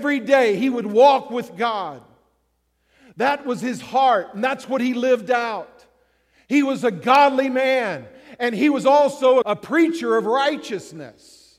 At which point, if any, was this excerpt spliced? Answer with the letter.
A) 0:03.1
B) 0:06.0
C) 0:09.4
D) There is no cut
C